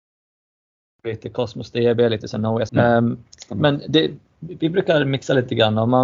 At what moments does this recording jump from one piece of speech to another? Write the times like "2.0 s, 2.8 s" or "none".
2.7 s

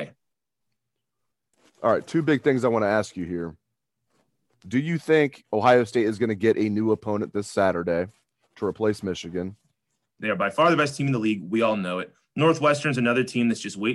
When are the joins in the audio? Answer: 10.2 s

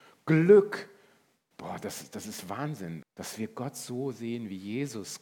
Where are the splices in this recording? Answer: 3.0 s

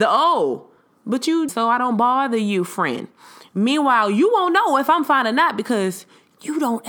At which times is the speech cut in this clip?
1.5 s

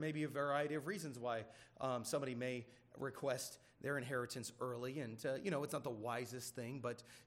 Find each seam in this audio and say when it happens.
none

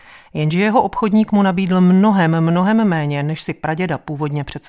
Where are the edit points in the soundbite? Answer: none

